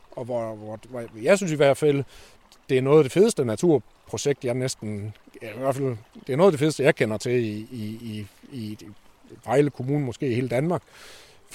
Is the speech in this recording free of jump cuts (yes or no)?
yes